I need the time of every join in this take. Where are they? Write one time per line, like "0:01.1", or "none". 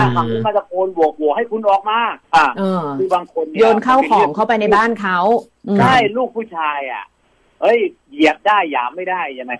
0:02.2